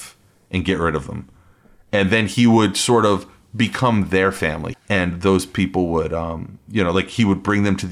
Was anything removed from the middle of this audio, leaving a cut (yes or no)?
yes